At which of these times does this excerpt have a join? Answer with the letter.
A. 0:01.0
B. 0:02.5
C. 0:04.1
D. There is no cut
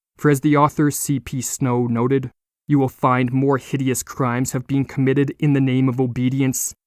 B